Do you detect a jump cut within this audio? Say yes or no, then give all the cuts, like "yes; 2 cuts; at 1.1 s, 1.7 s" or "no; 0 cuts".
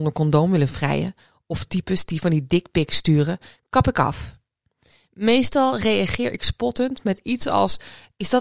no; 0 cuts